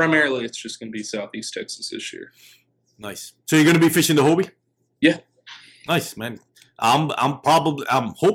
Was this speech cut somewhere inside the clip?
no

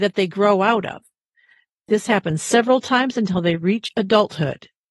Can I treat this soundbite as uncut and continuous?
yes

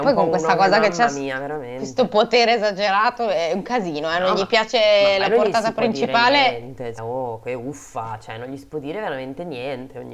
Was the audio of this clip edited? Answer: yes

